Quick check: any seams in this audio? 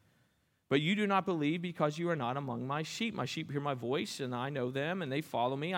no; 0 cuts

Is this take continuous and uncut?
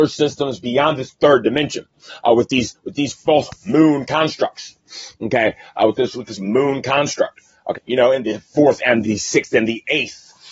no; 2 cuts; at 7.7 s, 9.0 s

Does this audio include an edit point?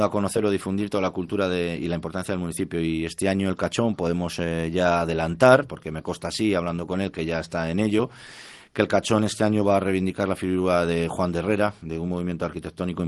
no; 0 cuts

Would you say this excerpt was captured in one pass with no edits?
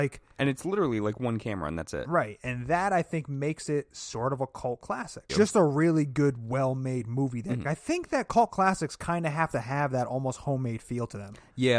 no; 2 cuts; at 5.3 s, 7.6 s

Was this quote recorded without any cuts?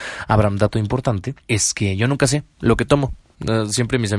no; 1 cut; at 1.4 s

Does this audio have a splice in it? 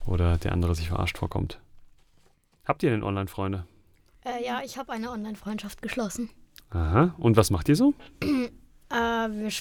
no; 0 cuts

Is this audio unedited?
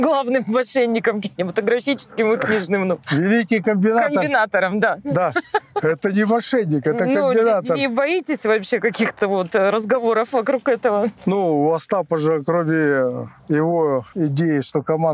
yes; 0 cuts

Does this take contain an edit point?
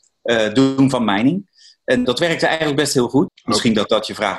yes; 2 cuts; at 2.0 s, 3.3 s

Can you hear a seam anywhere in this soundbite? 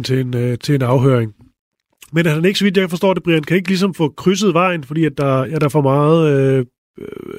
no; 0 cuts

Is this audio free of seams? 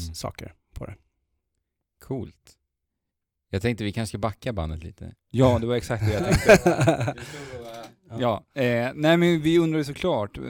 yes; 0 cuts

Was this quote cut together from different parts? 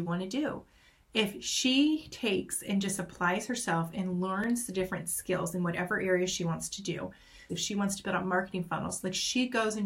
yes; 1 cut; at 7.5 s

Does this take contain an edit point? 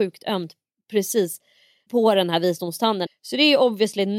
yes; 2 cuts; at 1.9 s, 3.1 s

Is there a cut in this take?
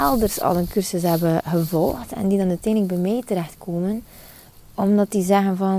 no; 0 cuts

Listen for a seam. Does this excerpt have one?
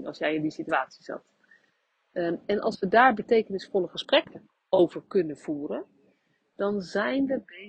no; 0 cuts

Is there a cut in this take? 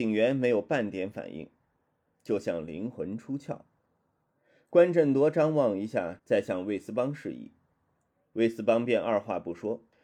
yes; 1 cut; at 6.2 s

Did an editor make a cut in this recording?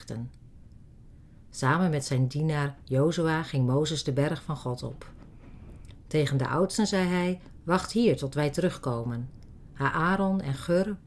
no; 0 cuts

